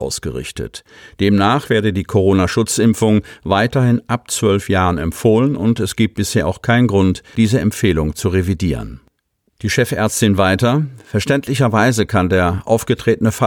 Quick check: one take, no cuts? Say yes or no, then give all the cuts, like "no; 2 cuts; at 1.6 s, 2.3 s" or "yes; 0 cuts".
yes; 0 cuts